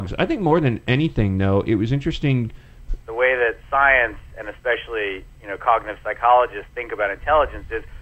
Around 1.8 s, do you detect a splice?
no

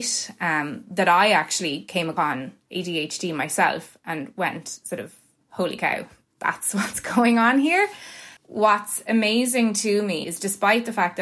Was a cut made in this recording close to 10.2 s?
yes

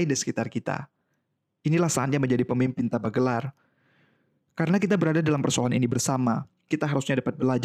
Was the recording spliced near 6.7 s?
yes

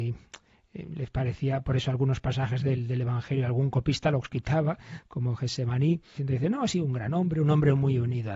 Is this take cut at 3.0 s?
no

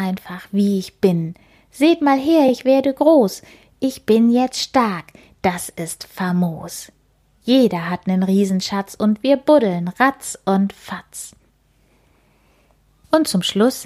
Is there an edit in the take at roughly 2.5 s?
no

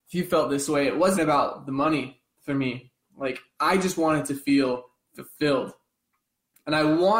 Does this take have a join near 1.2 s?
yes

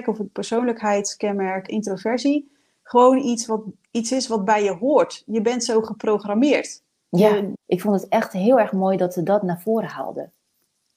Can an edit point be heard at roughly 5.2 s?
no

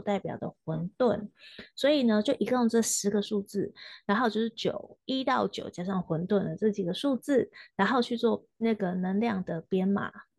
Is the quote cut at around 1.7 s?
no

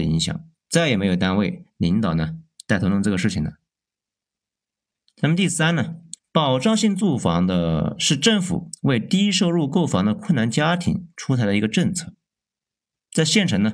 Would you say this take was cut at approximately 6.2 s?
yes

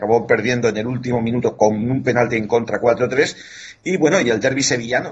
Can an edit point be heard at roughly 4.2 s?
no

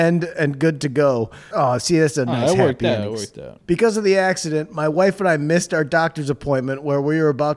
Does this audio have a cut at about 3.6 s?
yes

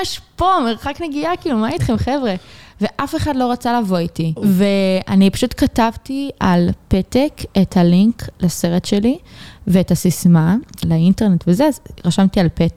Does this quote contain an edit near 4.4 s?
yes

